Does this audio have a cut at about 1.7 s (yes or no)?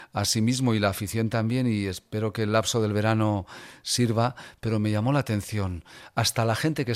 no